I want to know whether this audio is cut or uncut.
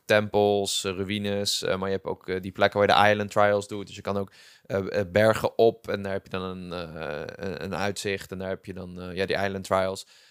uncut